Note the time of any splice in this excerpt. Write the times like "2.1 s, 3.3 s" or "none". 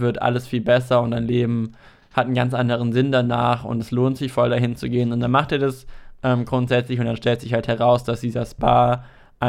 none